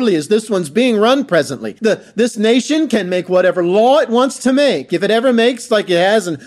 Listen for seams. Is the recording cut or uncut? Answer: cut